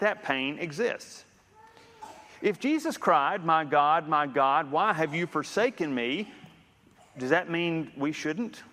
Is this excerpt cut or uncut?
uncut